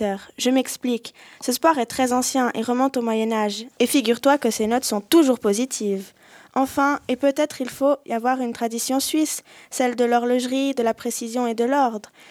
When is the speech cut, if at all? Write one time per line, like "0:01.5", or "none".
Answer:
0:03.7